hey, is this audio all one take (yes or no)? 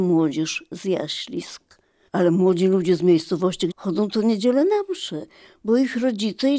no